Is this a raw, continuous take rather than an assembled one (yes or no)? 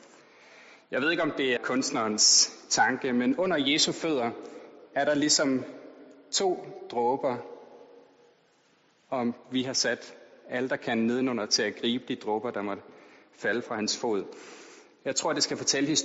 no